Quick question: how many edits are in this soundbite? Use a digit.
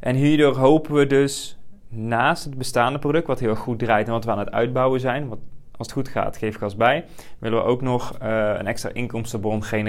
0